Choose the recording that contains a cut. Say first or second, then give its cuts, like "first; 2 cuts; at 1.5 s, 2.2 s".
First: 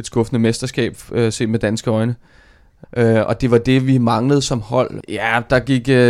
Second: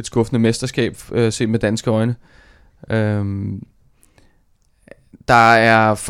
first; 2 cuts; at 2.8 s, 5.0 s